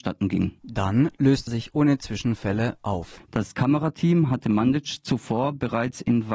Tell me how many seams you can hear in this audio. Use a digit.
2